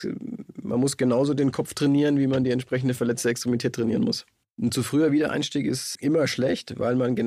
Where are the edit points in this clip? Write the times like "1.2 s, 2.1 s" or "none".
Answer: 4.4 s, 5.9 s